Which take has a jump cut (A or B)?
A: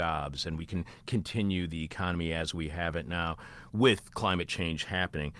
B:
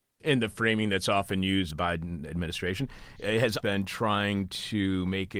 B